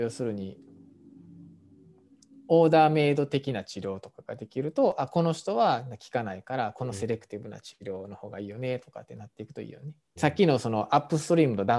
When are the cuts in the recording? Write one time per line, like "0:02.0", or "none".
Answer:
0:10.2

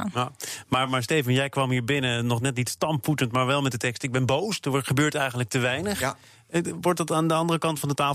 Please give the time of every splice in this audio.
none

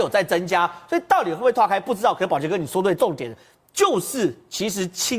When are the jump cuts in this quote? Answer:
0:03.0

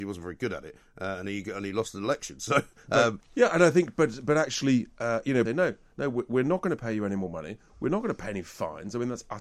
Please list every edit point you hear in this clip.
0:03.2
0:05.4

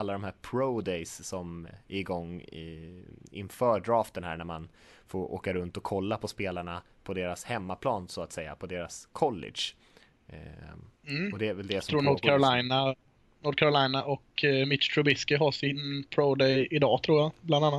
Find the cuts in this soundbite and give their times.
0:01.7

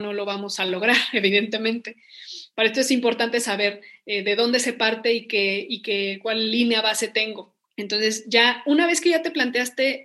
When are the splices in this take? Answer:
0:02.5
0:07.6

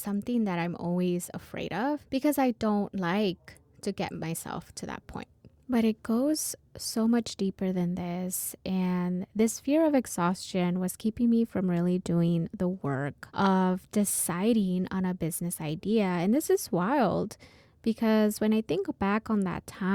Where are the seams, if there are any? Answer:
none

